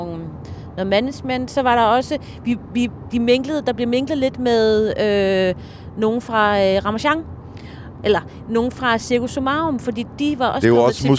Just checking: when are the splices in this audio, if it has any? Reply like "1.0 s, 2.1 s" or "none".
3.1 s